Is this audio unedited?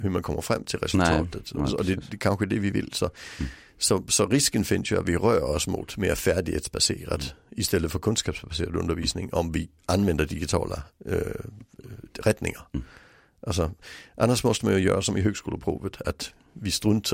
no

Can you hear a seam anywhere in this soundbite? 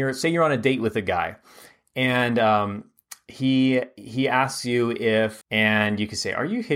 yes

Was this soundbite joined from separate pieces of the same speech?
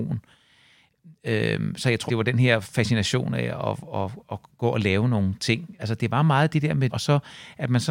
yes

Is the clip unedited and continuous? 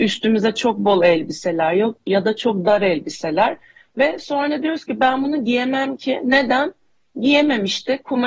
yes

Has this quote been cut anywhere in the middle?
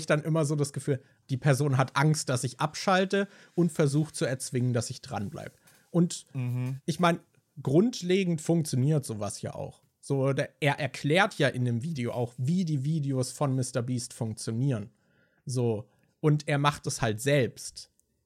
yes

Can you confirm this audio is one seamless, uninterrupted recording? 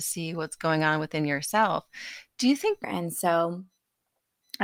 no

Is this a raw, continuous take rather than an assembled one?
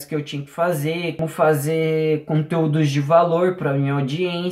yes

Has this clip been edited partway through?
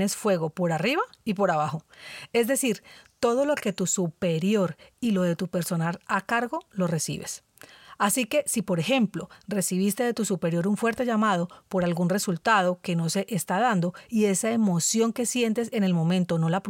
no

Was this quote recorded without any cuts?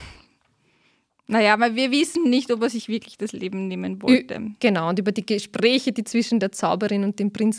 yes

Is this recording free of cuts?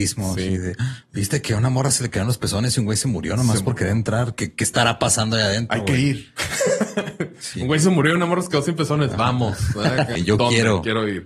no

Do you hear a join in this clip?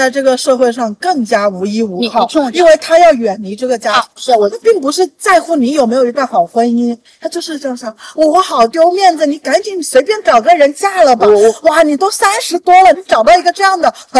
yes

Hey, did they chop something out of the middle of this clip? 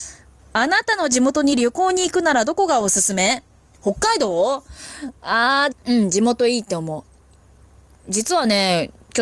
yes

